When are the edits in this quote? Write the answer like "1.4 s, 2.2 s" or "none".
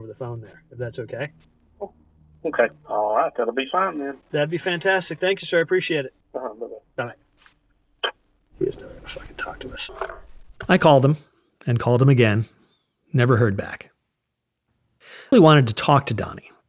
15.3 s